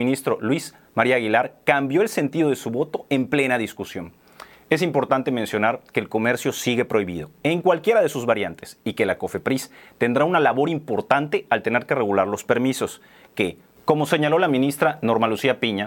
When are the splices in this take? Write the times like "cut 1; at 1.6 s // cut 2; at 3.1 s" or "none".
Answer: none

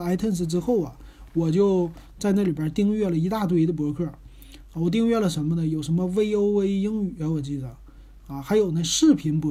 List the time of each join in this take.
none

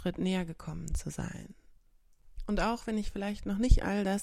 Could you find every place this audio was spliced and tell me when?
none

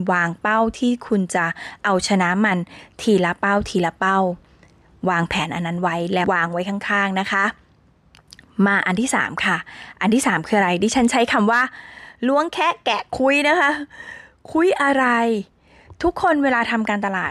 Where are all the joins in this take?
cut 1; at 6.2 s

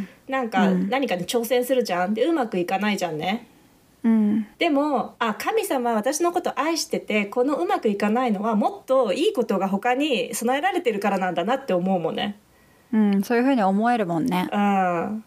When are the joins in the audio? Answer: cut 1; at 4.5 s

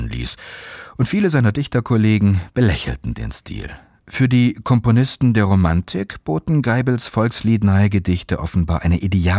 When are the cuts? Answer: cut 1; at 4.0 s

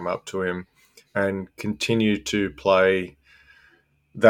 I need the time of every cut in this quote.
cut 1; at 1.0 s

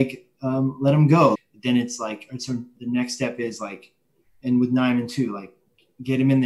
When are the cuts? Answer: cut 1; at 1.3 s // cut 2; at 2.8 s

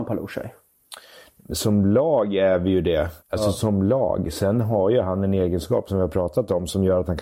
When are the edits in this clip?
cut 1; at 3.2 s

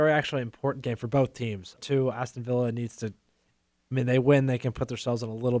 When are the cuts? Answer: cut 1; at 1.8 s

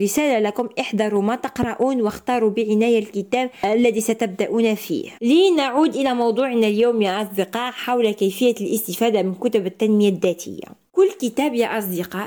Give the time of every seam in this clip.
cut 1; at 5.2 s // cut 2; at 10.9 s

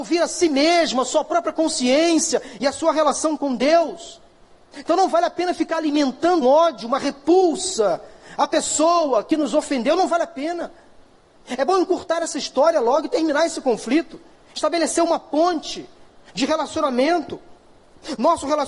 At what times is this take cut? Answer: cut 1; at 6.4 s

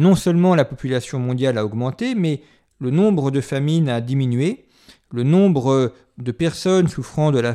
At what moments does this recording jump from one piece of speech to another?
none

